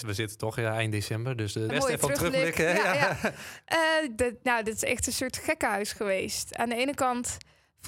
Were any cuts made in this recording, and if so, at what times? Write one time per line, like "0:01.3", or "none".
0:01.7